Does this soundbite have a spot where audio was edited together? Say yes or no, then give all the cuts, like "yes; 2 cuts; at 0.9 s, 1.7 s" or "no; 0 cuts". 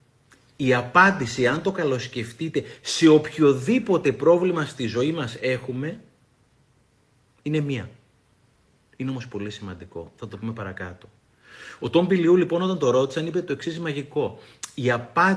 yes; 1 cut; at 8.8 s